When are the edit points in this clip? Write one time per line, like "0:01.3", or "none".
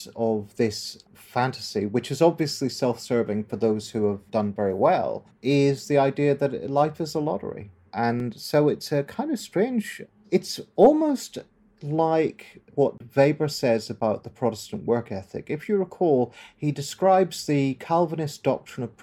none